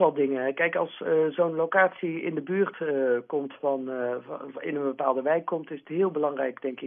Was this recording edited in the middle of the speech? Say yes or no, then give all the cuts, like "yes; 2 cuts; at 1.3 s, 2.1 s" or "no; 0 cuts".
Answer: no; 0 cuts